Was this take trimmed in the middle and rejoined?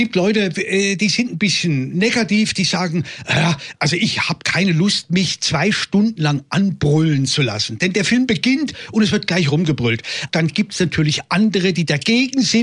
yes; 1 cut; at 10.3 s

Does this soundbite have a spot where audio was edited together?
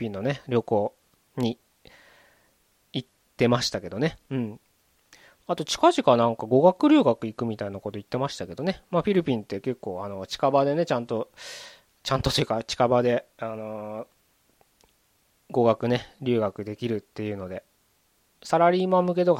no; 0 cuts

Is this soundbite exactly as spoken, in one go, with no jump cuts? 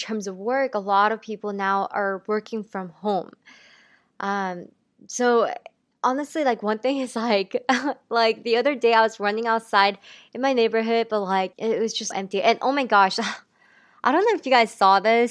no; 1 cut; at 12.1 s

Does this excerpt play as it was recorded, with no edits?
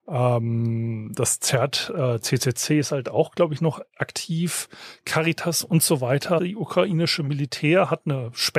no; 1 cut; at 6.4 s

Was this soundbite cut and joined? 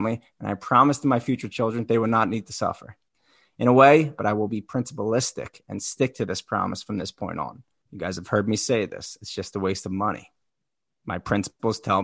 yes; 2 cuts; at 4.2 s, 7.9 s

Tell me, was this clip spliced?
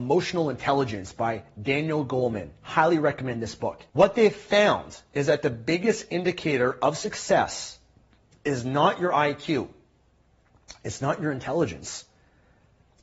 yes; 1 cut; at 3.9 s

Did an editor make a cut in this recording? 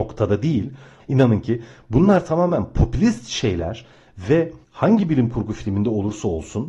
yes; 2 cuts; at 1.0 s, 4.6 s

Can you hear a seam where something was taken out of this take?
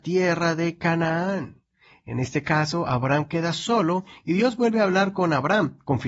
no; 0 cuts

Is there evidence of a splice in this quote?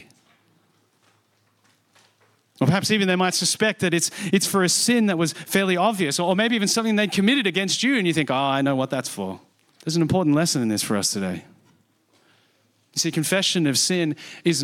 yes; 1 cut; at 9.7 s

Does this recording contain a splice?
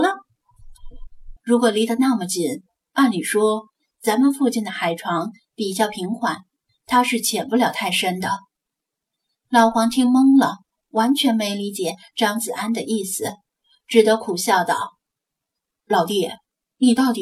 yes; 1 cut; at 1.4 s

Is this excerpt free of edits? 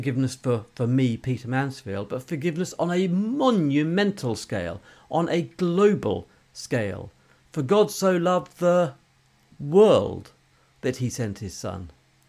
yes; 0 cuts

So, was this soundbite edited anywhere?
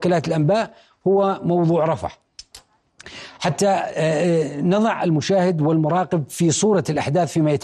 no; 0 cuts

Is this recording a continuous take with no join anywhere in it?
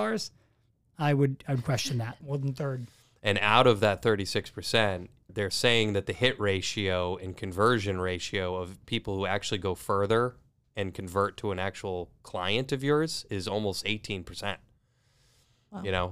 no; 2 cuts; at 2.2 s, 5.3 s

